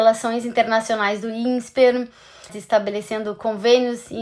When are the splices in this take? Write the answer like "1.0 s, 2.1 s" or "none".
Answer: 2.5 s